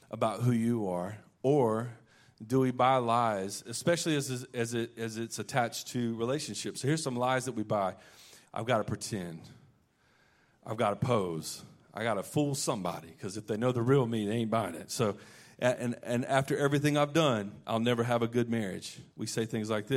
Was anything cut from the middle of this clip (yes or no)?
yes